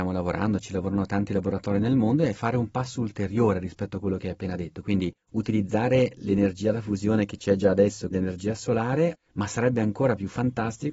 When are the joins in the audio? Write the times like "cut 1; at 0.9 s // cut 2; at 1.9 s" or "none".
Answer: cut 1; at 8.1 s // cut 2; at 9.1 s